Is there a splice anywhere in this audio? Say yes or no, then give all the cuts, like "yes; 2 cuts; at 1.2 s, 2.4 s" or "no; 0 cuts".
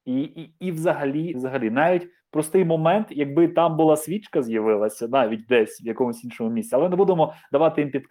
yes; 1 cut; at 1.3 s